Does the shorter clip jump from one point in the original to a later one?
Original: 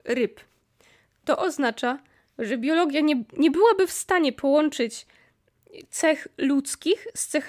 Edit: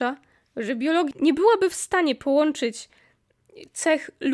yes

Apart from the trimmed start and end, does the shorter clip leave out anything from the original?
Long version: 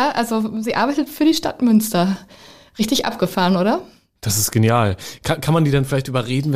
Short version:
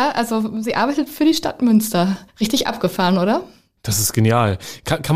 yes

